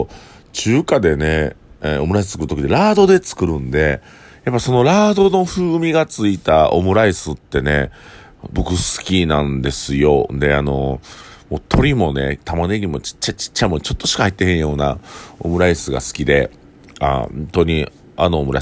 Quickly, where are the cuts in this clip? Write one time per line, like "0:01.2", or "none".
0:10.3